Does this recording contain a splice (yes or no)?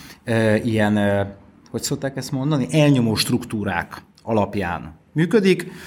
no